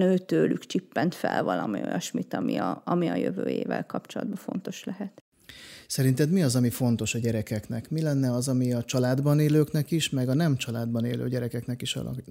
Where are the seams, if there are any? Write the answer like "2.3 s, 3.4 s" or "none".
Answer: none